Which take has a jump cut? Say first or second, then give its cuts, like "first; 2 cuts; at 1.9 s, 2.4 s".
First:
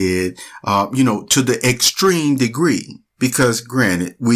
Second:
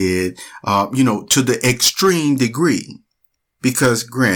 first; 1 cut; at 3.1 s